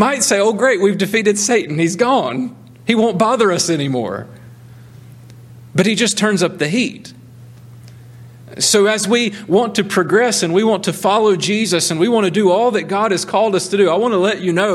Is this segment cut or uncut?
uncut